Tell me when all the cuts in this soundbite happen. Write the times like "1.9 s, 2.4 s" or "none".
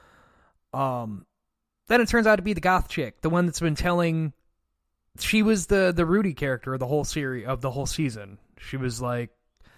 none